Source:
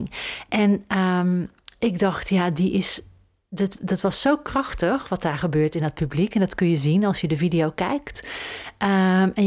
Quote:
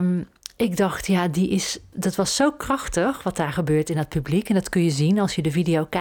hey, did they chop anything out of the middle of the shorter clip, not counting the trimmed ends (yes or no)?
yes